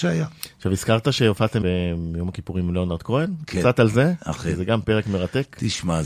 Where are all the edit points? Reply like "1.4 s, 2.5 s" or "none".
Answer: 1.6 s